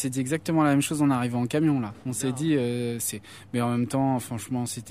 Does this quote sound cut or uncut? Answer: uncut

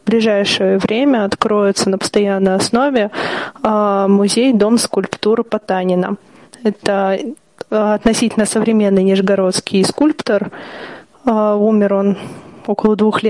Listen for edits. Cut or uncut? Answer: uncut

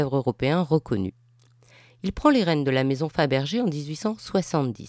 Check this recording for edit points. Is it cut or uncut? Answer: uncut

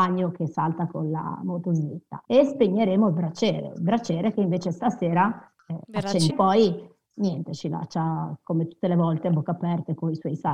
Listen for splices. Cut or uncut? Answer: cut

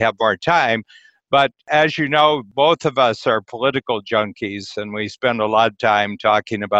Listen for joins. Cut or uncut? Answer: uncut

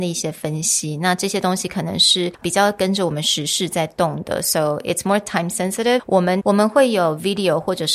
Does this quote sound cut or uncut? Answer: cut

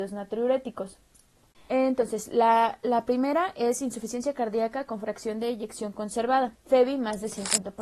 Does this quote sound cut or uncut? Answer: cut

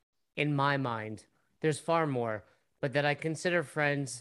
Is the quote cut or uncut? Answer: uncut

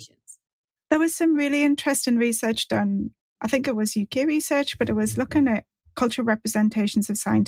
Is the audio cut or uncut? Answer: uncut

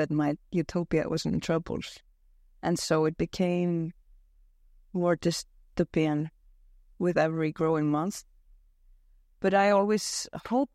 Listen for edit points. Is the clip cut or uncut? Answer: uncut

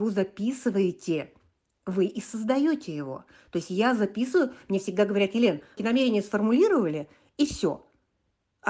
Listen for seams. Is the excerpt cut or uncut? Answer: cut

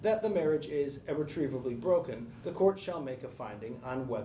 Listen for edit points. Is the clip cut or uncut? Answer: uncut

